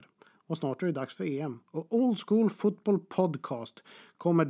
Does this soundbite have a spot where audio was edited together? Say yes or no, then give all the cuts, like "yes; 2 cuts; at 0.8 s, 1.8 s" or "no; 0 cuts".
no; 0 cuts